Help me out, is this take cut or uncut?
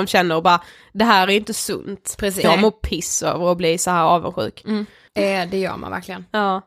cut